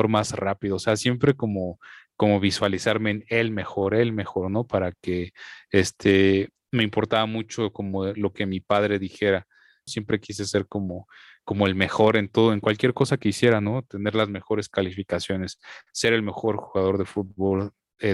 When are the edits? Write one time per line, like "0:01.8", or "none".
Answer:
0:09.9